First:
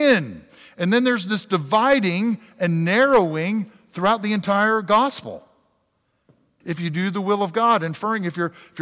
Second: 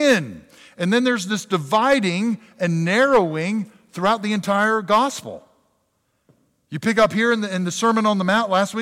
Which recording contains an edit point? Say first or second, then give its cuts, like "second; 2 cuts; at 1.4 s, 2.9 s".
first; 1 cut; at 6.6 s